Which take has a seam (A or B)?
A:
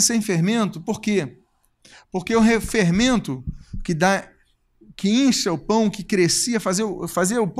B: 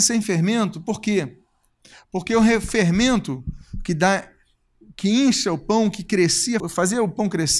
B